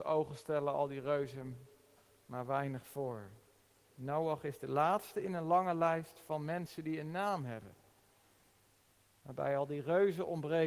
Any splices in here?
yes; 1 cut; at 3.9 s

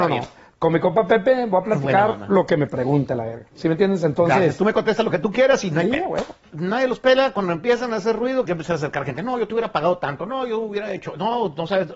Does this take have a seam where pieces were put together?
yes; 2 cuts; at 6.5 s, 8.4 s

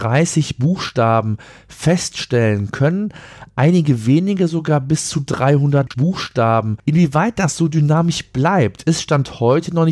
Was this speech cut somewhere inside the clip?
no; 0 cuts

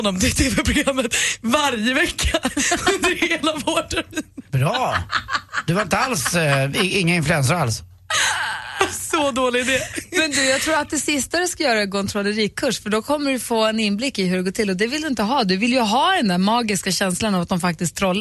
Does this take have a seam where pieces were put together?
no; 0 cuts

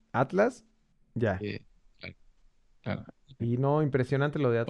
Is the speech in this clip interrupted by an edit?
yes; 1 cut; at 3.4 s

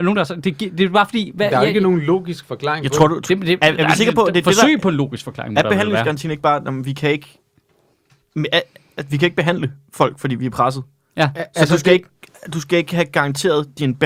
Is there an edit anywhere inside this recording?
no; 0 cuts

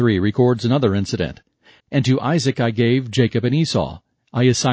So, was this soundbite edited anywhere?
yes; 1 cut; at 1.8 s

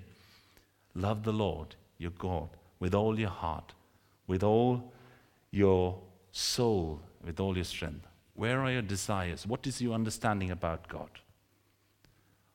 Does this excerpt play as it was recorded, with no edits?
yes; 0 cuts

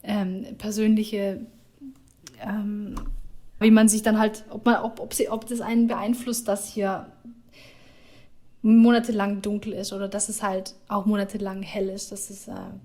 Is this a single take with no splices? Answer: no; 1 cut; at 3.6 s

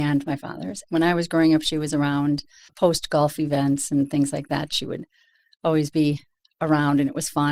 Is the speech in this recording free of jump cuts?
yes; 0 cuts

